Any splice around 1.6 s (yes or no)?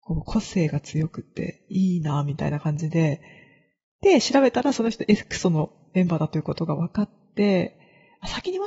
no